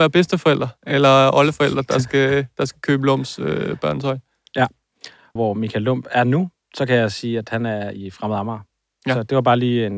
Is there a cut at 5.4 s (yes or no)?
yes